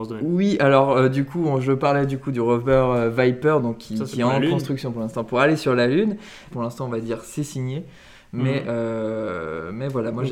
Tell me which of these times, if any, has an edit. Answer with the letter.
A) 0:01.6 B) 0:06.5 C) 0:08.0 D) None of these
B